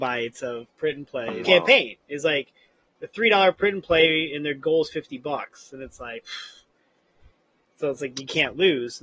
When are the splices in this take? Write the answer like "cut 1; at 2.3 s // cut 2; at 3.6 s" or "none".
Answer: cut 1; at 1.4 s